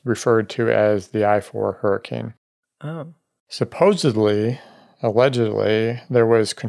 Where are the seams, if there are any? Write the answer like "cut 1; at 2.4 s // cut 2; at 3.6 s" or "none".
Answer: none